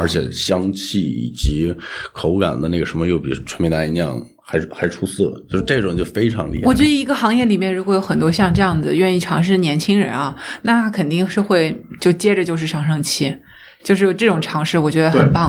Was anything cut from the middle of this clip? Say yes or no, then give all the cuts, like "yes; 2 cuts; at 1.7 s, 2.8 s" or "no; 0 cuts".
no; 0 cuts